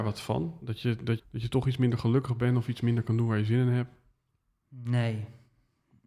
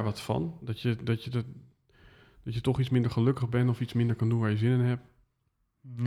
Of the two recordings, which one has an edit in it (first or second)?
first